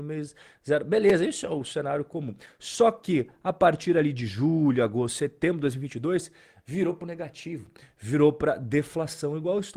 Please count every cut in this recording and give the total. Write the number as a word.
zero